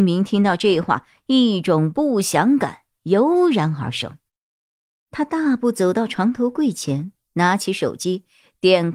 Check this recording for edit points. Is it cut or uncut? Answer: uncut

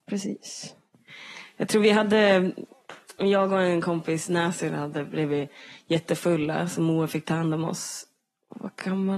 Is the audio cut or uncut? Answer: uncut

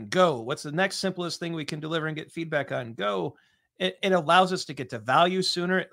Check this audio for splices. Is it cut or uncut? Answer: cut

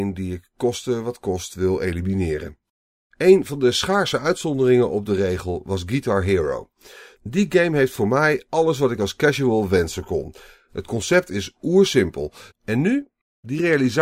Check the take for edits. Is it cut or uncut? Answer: cut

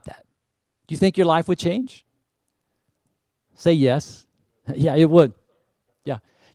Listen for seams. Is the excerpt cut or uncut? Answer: uncut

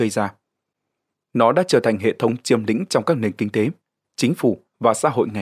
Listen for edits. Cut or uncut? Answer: uncut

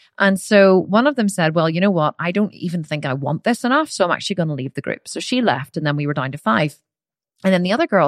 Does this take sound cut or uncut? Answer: uncut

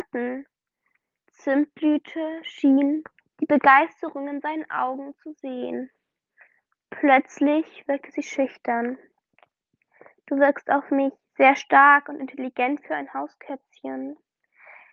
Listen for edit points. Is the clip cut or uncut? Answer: uncut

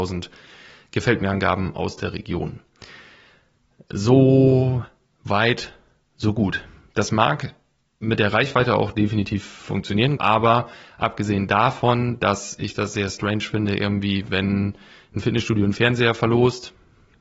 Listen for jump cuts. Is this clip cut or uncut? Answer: cut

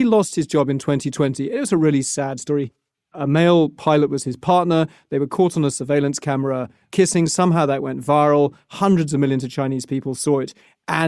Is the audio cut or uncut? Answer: uncut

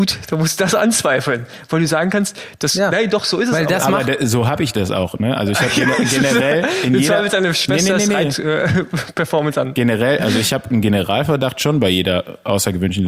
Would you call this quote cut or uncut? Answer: uncut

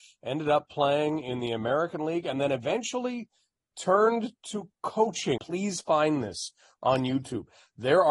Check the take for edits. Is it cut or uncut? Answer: cut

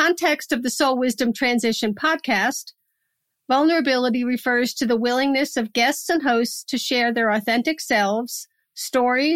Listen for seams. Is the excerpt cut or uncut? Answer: uncut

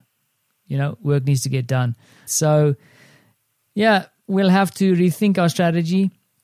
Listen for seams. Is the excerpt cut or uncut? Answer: cut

